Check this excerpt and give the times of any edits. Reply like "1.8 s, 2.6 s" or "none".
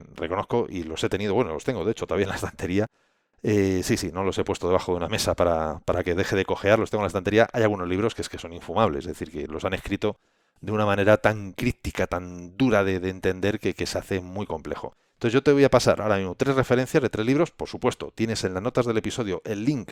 none